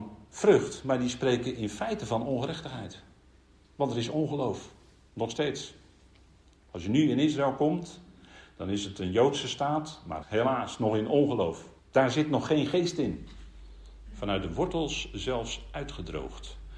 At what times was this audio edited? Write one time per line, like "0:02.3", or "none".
0:10.2
0:11.8
0:14.1